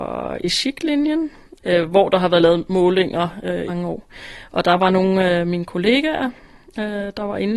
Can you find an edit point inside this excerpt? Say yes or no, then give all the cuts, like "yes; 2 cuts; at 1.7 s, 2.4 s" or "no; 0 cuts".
yes; 1 cut; at 3.7 s